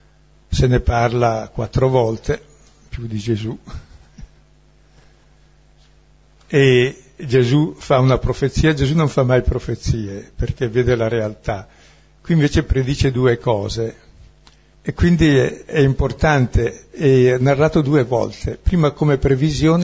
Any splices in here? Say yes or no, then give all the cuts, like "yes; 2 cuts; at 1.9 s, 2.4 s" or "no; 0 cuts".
yes; 1 cut; at 14.7 s